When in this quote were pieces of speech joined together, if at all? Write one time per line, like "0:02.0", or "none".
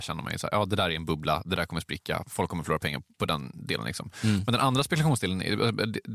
none